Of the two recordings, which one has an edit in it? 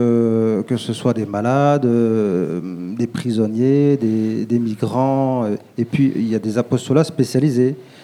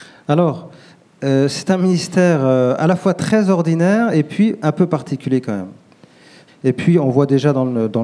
second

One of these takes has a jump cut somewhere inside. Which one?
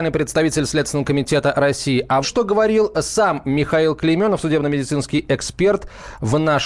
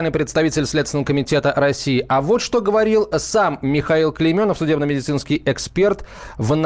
first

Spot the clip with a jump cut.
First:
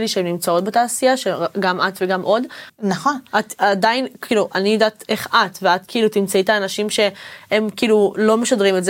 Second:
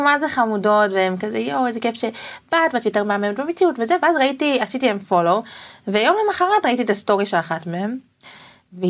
first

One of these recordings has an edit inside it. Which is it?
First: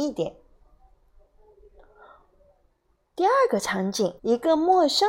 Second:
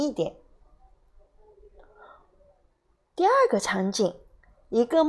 first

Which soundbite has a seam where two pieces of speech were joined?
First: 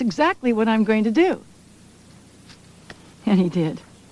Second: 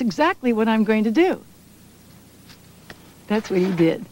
second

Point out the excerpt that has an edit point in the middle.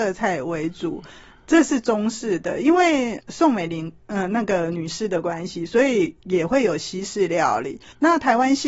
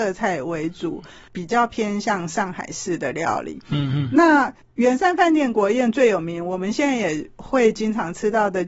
second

